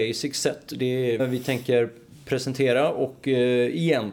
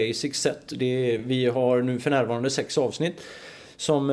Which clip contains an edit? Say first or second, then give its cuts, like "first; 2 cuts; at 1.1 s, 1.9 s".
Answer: first; 1 cut; at 1.2 s